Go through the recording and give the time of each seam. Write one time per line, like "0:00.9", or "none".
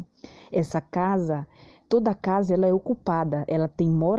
none

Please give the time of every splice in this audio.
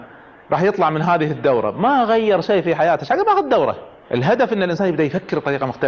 none

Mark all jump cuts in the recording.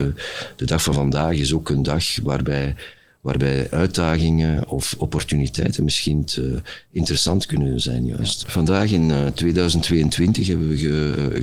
0:08.4

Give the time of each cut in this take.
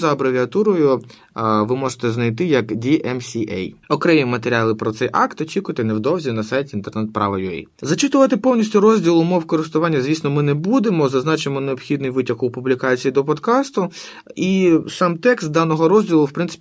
0:03.8

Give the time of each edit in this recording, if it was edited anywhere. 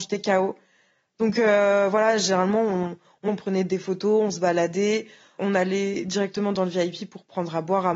0:03.3
0:05.4

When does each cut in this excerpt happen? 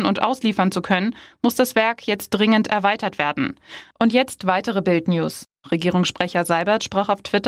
0:03.9
0:05.6

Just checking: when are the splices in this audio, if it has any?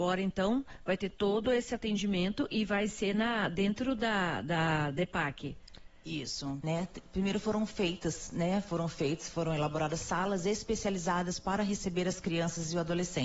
0:06.6

